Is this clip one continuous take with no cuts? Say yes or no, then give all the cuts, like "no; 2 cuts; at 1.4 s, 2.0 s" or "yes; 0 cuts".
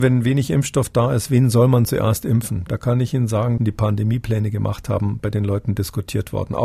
no; 1 cut; at 3.6 s